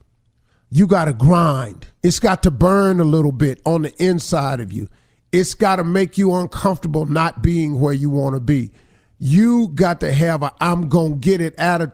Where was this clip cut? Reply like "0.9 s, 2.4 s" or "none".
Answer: 2.0 s